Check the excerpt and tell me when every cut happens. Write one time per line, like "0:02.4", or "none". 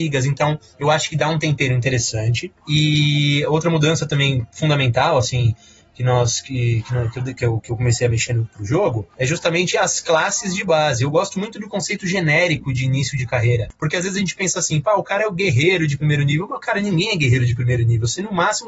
0:02.6